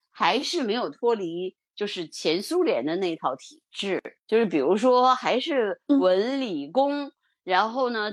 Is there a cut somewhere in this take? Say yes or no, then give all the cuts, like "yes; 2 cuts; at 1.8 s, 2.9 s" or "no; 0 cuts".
yes; 1 cut; at 4.2 s